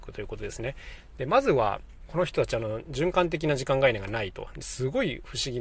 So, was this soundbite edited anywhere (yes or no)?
yes